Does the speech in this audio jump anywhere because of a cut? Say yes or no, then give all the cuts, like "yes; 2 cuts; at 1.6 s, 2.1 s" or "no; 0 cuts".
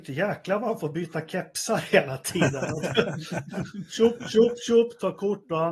no; 0 cuts